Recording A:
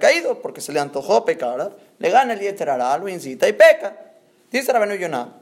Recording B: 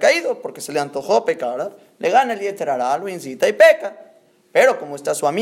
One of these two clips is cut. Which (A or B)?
A